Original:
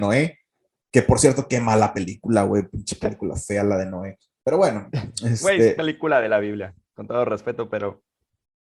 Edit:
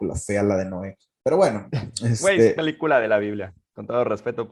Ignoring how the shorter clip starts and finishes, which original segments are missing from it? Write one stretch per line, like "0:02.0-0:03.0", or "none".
none